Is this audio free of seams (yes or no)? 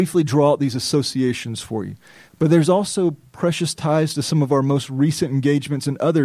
no